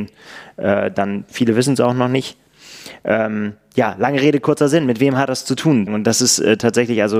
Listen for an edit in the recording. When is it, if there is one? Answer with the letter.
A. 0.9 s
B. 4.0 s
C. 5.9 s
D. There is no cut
C